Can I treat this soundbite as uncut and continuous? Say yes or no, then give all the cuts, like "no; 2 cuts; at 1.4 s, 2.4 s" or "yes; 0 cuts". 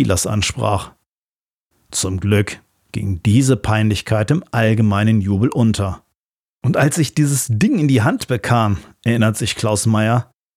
no; 1 cut; at 6.5 s